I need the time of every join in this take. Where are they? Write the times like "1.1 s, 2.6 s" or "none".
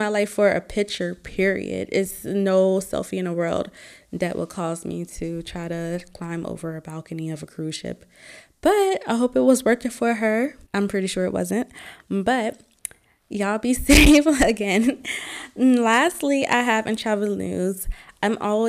10.7 s